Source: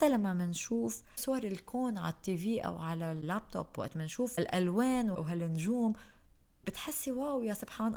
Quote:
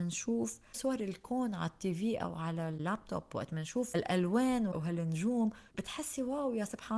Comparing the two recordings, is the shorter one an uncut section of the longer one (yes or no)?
no